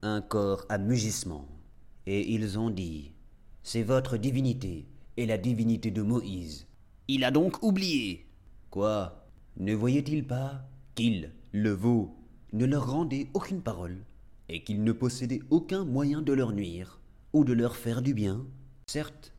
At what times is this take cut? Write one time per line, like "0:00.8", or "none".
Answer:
none